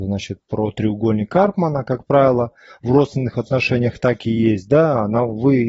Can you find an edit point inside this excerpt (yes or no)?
no